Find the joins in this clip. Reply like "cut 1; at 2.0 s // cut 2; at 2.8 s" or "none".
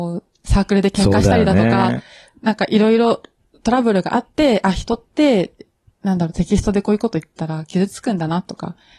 none